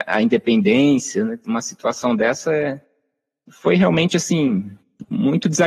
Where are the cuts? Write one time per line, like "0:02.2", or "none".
none